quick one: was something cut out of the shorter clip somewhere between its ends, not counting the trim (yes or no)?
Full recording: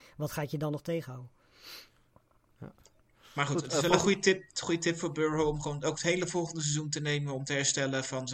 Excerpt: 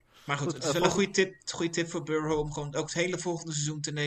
no